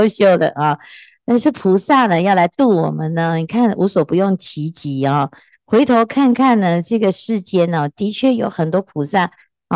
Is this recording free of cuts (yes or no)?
yes